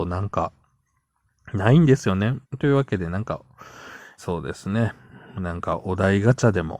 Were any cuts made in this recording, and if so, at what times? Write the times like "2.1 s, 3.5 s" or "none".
2.4 s, 4.2 s

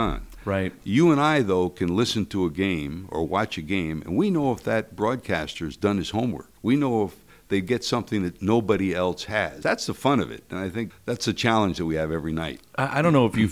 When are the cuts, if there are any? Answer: 6.6 s, 9.6 s, 10.9 s

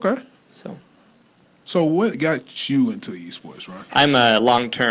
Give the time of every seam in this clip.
3.9 s

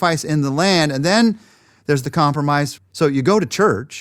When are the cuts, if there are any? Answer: 2.8 s

